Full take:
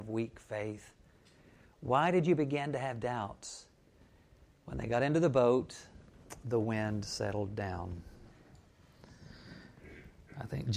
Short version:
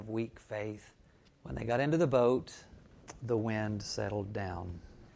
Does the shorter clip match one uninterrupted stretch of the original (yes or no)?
no